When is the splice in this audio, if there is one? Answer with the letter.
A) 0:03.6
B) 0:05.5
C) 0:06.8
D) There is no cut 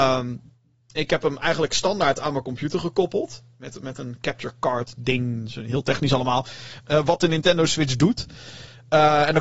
C